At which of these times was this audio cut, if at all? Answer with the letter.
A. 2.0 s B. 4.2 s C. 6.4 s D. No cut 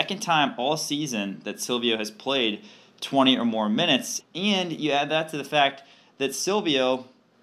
B